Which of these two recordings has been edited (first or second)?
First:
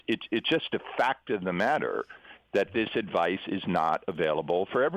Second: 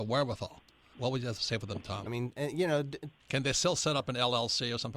second